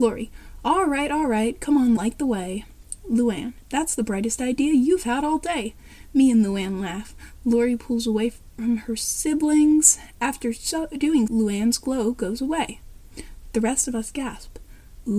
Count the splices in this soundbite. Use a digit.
2